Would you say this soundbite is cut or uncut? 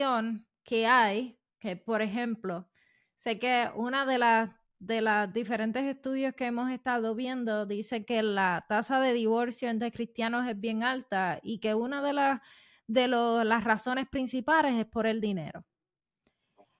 uncut